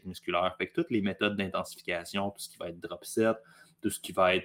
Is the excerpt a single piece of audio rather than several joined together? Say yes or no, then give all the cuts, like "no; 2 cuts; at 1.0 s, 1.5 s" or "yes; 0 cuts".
yes; 0 cuts